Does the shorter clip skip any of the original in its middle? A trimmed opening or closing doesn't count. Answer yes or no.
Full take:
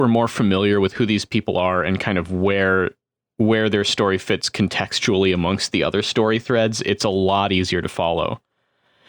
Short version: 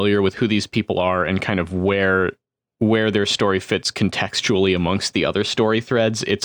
no